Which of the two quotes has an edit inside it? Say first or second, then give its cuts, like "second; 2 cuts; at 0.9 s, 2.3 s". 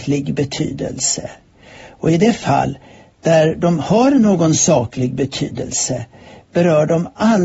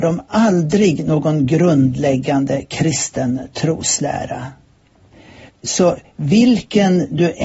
second; 1 cut; at 5.5 s